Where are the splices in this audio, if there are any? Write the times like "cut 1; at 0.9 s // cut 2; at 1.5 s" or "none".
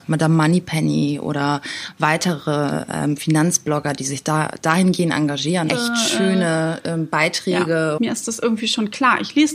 cut 1; at 5.7 s // cut 2; at 8.0 s